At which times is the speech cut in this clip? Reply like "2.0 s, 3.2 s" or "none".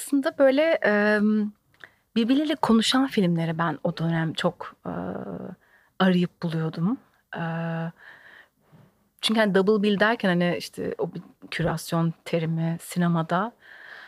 none

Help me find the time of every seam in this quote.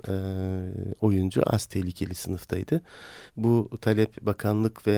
3.3 s

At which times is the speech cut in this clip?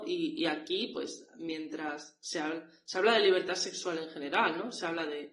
none

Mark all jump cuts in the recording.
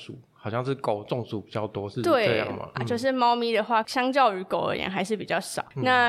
2.7 s, 3.8 s

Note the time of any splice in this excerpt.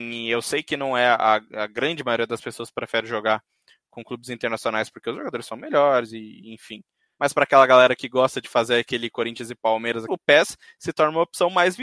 7.2 s, 10.1 s

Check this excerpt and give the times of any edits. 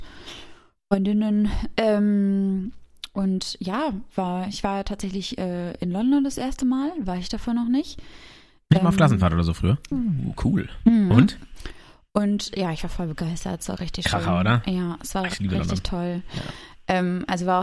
9.9 s

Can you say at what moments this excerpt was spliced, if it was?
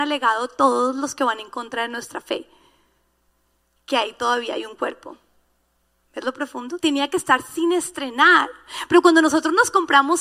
6.8 s

